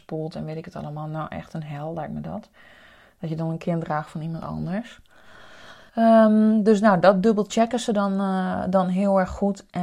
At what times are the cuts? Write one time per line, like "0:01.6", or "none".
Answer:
0:05.9